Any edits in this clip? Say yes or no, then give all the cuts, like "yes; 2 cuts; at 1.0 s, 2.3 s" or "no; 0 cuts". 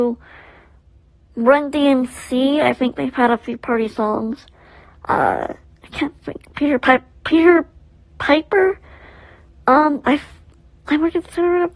no; 0 cuts